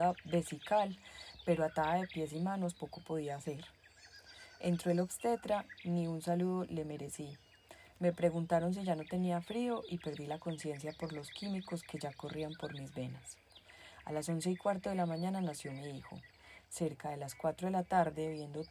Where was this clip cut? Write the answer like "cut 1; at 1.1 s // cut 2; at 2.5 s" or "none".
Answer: none